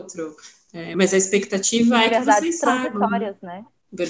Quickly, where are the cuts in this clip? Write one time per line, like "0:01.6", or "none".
none